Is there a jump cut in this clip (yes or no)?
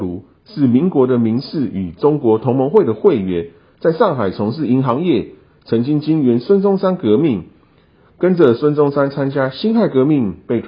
no